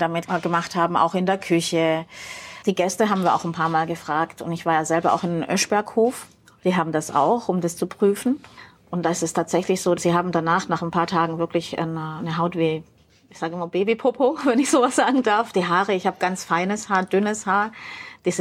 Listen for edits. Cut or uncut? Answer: uncut